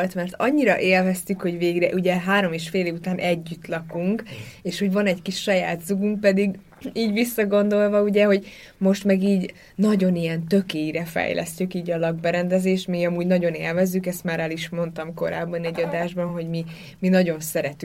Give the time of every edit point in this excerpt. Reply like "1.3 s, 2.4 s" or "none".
none